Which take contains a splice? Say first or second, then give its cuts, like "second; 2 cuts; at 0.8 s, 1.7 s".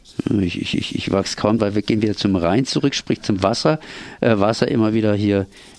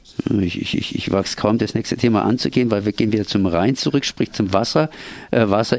first; 1 cut; at 1.6 s